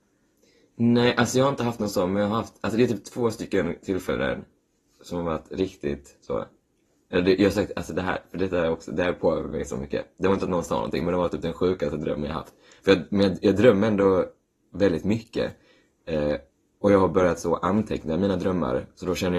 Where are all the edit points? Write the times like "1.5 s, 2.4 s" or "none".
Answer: none